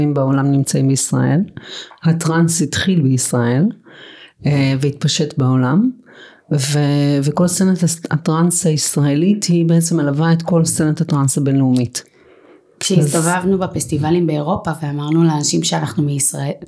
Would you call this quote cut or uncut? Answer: uncut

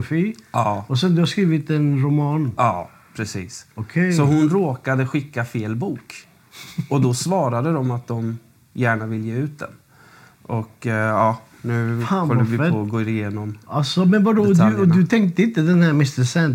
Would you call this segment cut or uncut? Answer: uncut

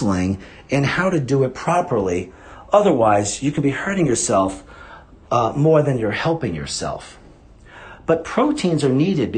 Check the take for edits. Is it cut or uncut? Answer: uncut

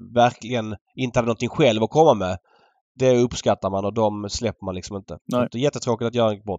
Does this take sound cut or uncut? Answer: uncut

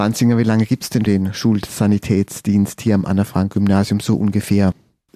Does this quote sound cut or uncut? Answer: cut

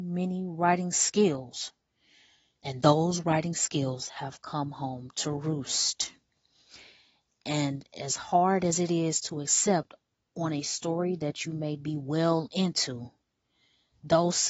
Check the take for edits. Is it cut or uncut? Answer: uncut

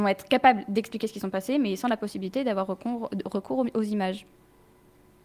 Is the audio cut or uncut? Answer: uncut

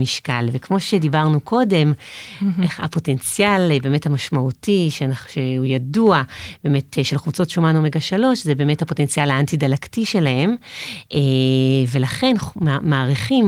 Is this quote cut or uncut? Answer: uncut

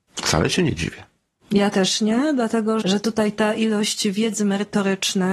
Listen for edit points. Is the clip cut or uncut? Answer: cut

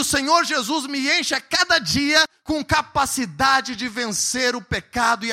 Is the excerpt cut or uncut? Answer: uncut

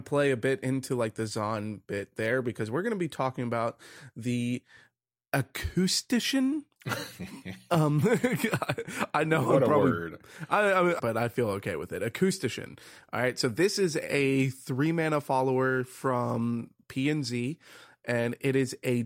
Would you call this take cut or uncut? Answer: cut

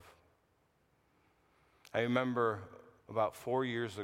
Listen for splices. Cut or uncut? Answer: cut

